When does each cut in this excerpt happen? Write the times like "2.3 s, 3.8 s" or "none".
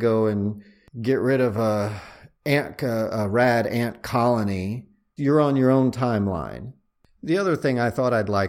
5.2 s